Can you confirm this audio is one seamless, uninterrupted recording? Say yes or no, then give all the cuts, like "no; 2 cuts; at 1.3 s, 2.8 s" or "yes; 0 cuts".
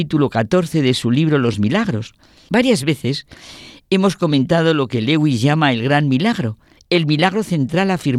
no; 2 cuts; at 2.5 s, 6.8 s